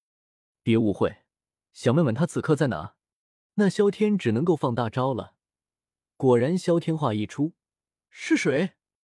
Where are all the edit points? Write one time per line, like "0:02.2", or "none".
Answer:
0:01.6
0:03.5
0:08.1

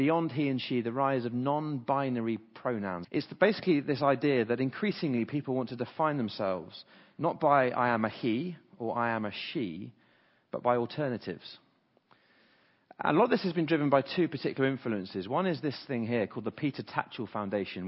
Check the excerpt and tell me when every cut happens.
0:03.0

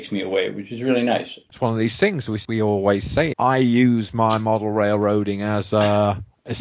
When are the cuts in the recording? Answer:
0:01.5
0:03.3

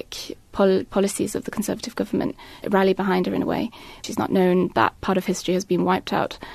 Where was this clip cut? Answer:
0:02.6
0:04.0

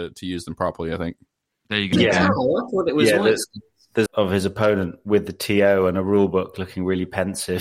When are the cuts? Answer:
0:01.9
0:04.1

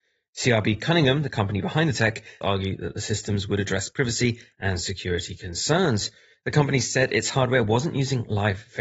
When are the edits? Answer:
0:02.4

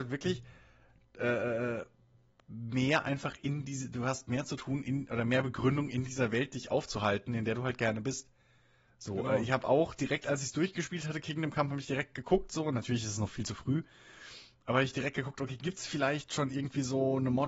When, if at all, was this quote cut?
none

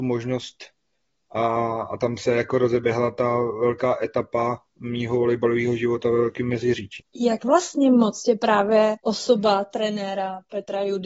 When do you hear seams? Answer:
0:04.7
0:07.0
0:09.0

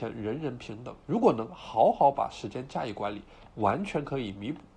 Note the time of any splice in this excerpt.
0:01.0

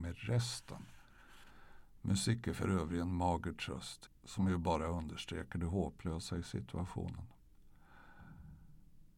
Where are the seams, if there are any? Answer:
0:04.1

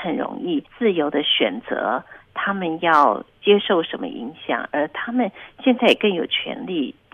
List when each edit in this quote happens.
none

